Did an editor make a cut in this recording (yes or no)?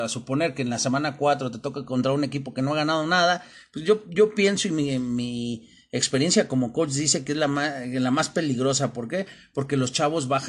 no